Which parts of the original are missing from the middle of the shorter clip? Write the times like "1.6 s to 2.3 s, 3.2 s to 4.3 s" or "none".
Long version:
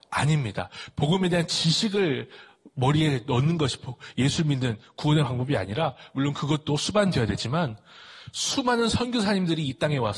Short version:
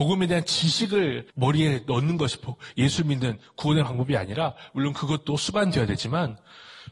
2.3 s to 2.7 s